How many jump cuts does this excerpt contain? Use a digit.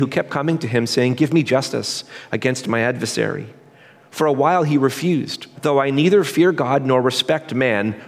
1